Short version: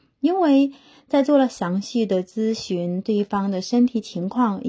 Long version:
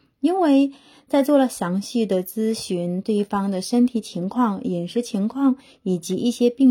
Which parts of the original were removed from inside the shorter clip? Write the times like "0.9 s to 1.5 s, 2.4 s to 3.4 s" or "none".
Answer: none